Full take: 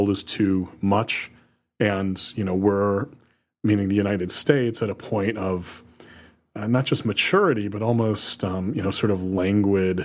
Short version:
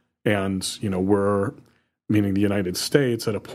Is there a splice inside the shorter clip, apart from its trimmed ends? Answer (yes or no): no